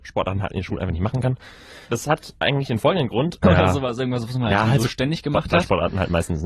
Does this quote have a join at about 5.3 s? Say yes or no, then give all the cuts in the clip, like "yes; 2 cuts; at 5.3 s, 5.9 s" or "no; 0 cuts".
no; 2 cuts; at 1.9 s, 3.4 s